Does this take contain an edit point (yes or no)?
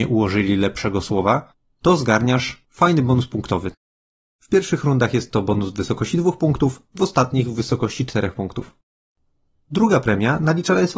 no